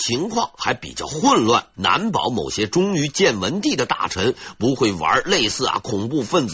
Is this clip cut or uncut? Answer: cut